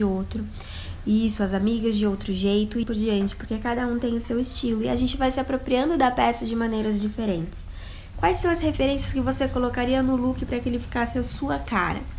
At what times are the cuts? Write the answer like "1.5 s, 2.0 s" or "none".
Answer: 2.8 s, 8.1 s